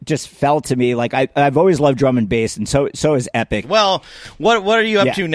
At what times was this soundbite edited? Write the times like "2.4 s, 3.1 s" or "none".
3.6 s